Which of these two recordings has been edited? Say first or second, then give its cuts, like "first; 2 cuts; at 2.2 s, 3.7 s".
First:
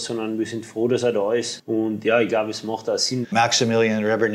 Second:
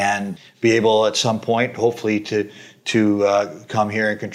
first; 1 cut; at 3.2 s